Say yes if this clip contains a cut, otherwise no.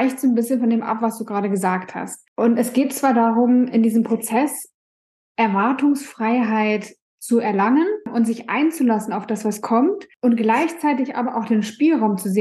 no